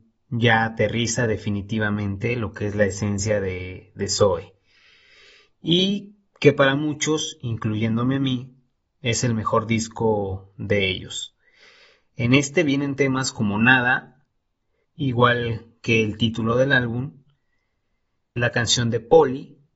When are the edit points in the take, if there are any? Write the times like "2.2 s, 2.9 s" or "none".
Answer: 14.8 s, 18.4 s